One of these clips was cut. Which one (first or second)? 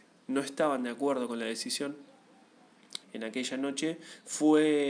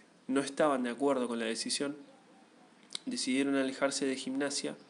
first